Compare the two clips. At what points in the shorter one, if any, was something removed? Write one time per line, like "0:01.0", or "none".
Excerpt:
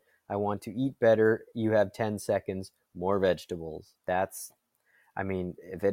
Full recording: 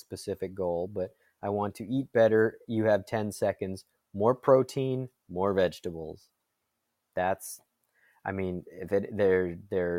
0:02.9
0:04.0